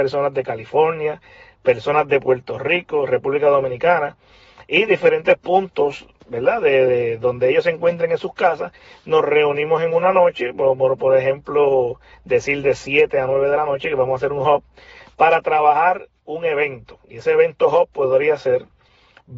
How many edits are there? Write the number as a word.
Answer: zero